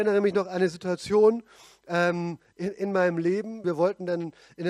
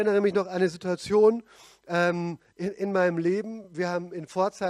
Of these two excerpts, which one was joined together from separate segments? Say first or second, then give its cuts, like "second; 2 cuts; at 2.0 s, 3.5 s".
first; 1 cut; at 3.6 s